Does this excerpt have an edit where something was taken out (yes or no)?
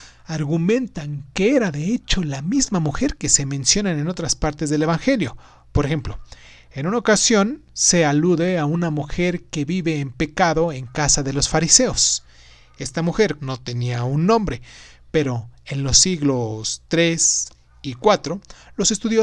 yes